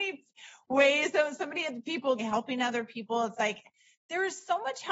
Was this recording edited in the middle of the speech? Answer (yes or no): yes